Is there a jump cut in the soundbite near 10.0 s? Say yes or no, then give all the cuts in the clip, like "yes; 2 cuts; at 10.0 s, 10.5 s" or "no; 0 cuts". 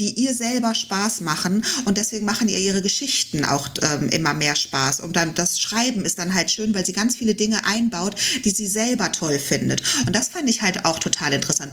no; 0 cuts